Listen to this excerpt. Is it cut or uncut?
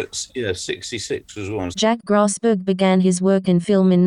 cut